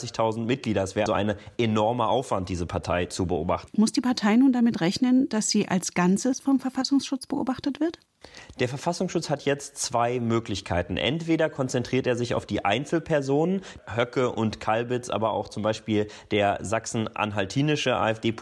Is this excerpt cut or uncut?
cut